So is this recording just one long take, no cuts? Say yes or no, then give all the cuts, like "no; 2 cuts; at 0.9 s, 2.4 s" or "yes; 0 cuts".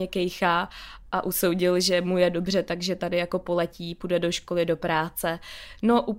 yes; 0 cuts